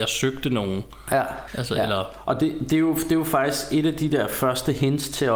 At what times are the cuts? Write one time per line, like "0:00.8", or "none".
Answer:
0:01.5